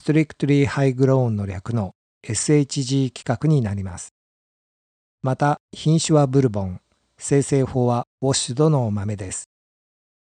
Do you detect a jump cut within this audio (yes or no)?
no